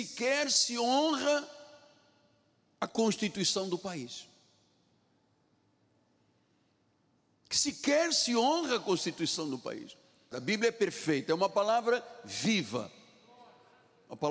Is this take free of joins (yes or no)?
no